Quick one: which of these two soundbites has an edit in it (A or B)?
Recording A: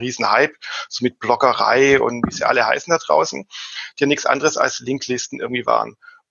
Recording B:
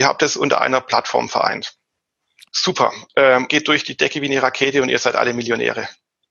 B